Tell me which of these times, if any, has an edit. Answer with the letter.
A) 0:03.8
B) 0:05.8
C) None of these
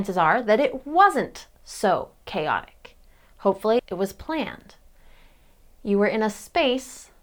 A